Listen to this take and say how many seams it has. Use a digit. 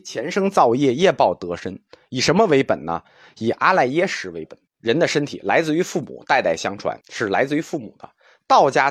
2